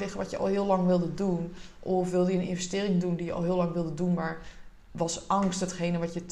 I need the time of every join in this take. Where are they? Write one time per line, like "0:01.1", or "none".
none